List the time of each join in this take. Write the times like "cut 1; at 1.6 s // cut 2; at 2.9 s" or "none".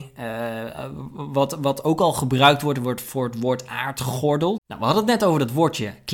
cut 1; at 4.6 s